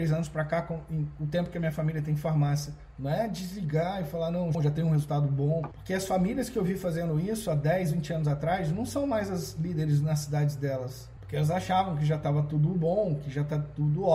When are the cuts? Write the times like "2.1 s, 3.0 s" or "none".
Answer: 2.9 s, 4.5 s, 11.2 s